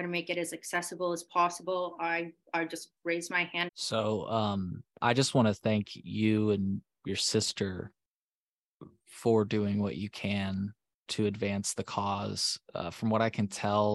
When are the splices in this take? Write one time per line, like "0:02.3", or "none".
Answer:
0:03.7